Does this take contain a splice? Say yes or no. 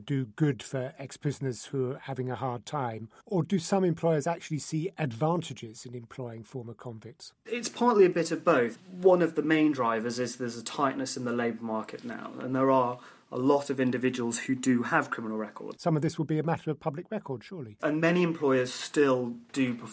yes